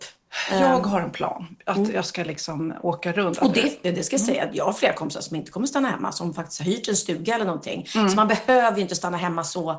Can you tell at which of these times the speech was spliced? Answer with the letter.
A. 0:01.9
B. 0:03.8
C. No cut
B